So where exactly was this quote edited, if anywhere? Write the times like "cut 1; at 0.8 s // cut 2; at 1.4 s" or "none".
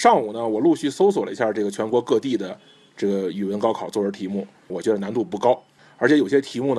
cut 1; at 4.7 s